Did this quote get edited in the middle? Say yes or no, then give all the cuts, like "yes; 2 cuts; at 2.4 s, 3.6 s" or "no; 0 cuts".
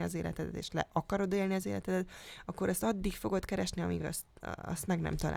no; 0 cuts